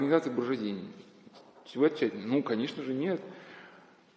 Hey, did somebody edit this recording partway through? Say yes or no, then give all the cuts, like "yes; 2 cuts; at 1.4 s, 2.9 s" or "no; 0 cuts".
no; 0 cuts